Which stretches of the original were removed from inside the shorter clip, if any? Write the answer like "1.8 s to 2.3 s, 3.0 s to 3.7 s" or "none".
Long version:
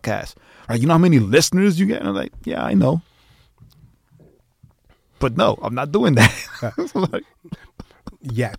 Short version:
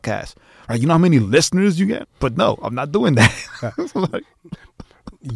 2.0 s to 5.0 s